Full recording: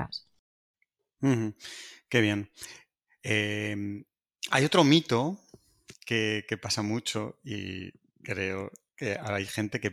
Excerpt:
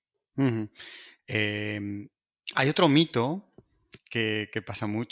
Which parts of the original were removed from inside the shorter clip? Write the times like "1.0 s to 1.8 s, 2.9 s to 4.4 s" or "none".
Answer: 2.0 s to 3.1 s